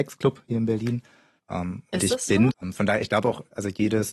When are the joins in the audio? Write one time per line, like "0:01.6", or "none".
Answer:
0:01.4
0:02.5